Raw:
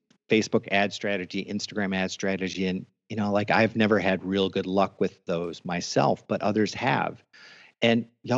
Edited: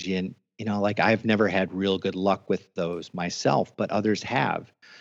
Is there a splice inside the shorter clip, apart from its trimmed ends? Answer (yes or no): no